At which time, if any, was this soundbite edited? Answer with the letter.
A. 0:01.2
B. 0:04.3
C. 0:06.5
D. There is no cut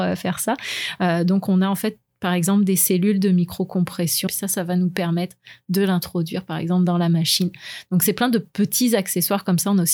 B